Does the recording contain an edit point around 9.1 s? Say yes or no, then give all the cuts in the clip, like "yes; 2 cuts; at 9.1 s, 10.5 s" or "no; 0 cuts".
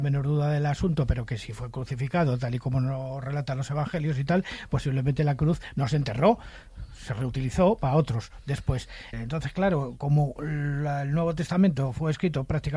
yes; 1 cut; at 9.1 s